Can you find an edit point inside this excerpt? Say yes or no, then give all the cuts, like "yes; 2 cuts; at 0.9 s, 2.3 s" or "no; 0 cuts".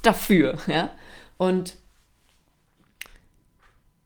no; 0 cuts